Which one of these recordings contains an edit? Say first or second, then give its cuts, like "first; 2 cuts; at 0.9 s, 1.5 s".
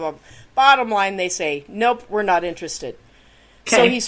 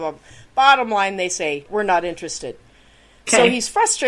second; 1 cut; at 1.7 s